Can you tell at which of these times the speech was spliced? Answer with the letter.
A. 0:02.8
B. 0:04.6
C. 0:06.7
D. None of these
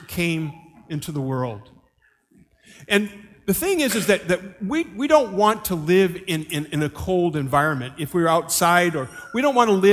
D